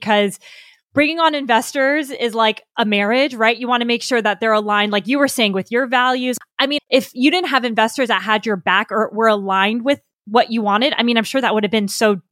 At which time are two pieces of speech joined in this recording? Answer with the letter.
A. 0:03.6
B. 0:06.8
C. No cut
B